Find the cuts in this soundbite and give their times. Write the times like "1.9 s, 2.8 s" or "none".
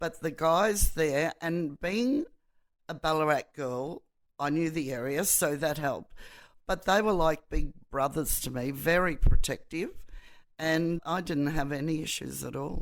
11.0 s